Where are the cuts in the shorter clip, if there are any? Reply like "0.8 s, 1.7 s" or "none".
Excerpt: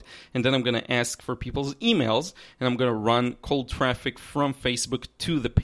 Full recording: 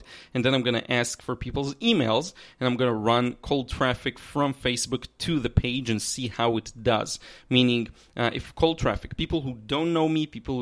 none